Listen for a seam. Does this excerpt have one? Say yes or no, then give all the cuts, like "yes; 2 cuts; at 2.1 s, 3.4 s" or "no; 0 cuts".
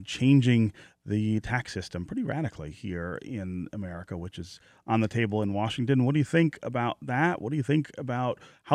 no; 0 cuts